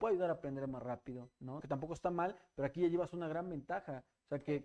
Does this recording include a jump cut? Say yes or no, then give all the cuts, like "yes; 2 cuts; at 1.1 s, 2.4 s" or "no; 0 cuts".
yes; 1 cut; at 1.6 s